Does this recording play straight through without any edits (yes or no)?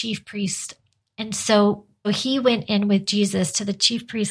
no